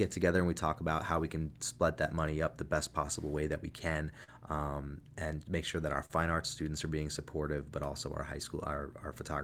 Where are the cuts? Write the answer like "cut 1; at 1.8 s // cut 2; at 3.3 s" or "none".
none